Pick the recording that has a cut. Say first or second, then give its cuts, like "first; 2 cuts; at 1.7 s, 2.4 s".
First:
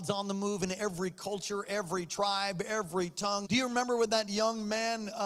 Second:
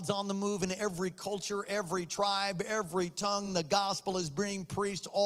first; 1 cut; at 3.4 s